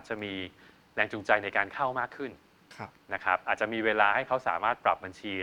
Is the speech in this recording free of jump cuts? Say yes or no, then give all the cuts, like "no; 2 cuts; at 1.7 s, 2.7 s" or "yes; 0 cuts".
yes; 0 cuts